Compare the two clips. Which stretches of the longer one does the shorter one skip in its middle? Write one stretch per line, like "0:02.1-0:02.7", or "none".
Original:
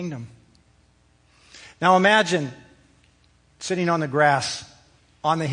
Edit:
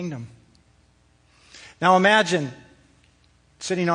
none